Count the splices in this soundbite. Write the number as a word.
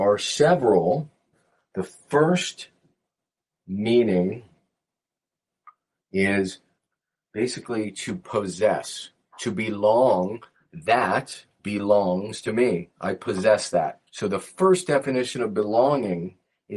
two